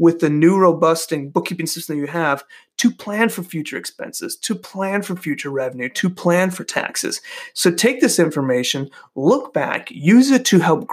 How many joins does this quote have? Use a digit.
0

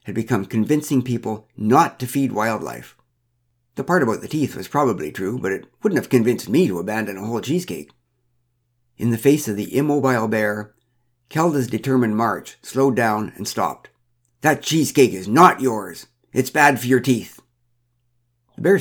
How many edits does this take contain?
2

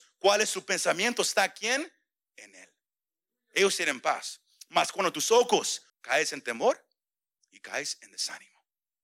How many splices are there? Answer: 1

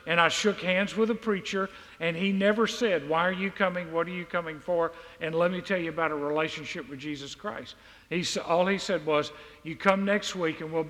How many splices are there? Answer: 0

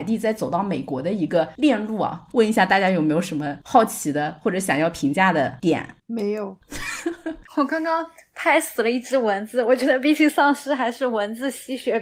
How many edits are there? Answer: 1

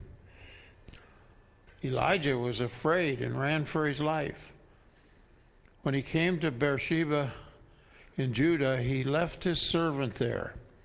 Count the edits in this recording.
1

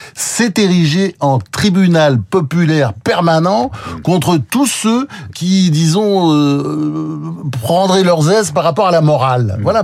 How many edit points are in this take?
1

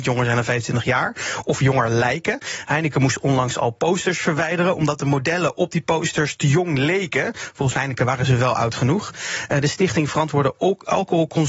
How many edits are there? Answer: 0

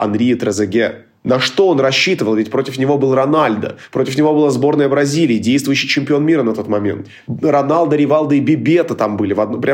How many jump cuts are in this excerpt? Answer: 0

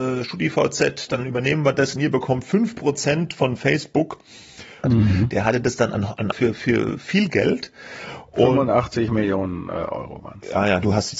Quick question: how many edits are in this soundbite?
2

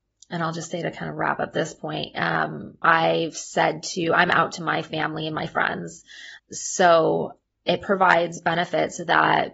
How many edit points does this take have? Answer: 2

